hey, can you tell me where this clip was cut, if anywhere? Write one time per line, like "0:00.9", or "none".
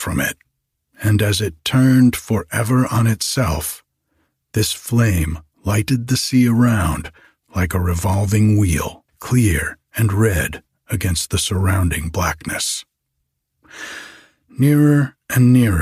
0:09.1